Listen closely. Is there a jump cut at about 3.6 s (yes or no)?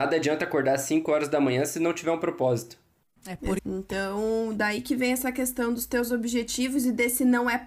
yes